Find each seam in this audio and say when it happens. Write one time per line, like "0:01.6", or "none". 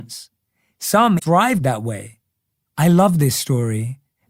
0:01.2
0:02.6

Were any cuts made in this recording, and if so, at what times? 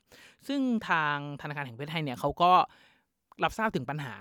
none

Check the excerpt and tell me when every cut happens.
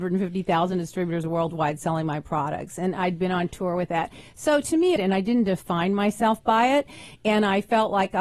0:05.0

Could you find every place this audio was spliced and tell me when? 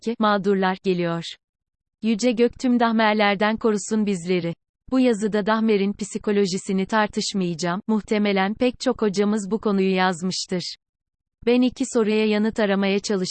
none

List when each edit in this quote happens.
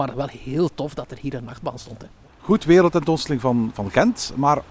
0:01.2

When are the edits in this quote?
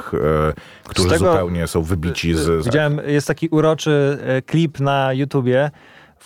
0:02.6

